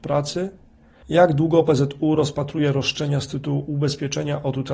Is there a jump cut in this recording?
yes; 1 cut; at 1.0 s

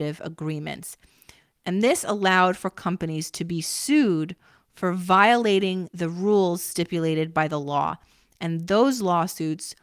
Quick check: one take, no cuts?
no; 1 cut; at 5.9 s

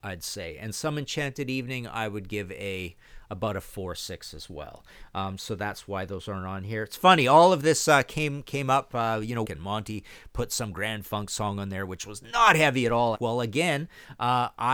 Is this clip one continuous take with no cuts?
no; 2 cuts; at 9.4 s, 13.1 s

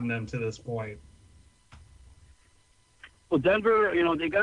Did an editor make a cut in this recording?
no; 0 cuts

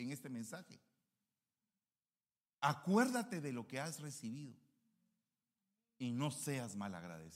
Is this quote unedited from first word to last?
yes; 0 cuts

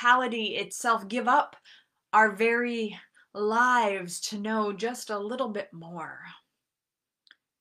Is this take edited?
no; 0 cuts

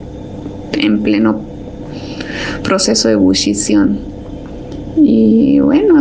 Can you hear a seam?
no; 0 cuts

